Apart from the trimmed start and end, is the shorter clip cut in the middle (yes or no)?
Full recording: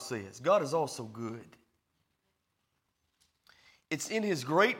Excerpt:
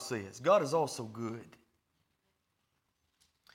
no